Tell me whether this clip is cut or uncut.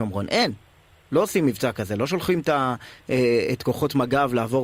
uncut